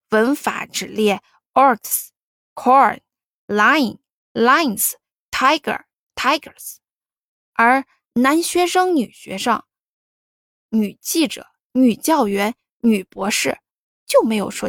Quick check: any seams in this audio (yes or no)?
no